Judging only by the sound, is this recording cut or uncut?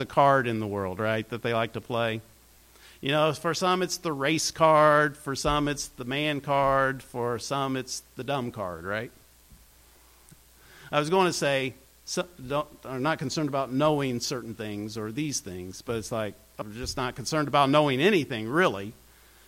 cut